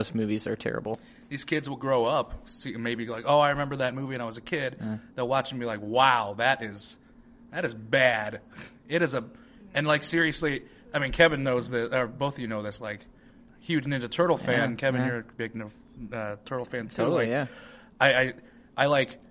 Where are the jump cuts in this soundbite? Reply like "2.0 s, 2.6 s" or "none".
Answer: none